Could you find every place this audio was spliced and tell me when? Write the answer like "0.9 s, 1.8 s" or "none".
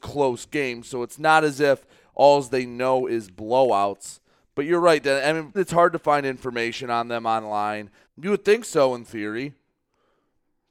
5.5 s, 8.1 s